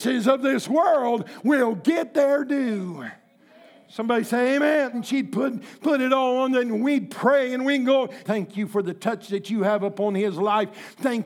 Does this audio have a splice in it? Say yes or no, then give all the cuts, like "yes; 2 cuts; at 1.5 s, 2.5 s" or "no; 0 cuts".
yes; 2 cuts; at 4.9 s, 8.2 s